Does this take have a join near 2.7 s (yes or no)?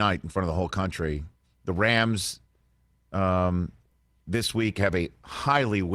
no